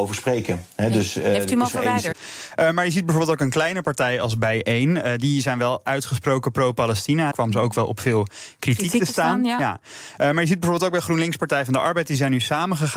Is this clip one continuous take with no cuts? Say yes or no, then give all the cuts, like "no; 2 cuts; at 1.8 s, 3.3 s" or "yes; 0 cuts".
no; 2 cuts; at 2.1 s, 7.3 s